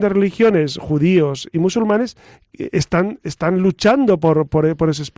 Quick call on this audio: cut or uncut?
uncut